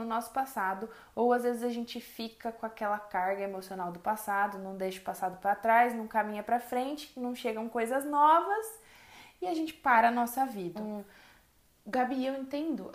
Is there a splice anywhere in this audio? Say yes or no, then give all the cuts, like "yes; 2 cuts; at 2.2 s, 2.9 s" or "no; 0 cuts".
yes; 1 cut; at 10.8 s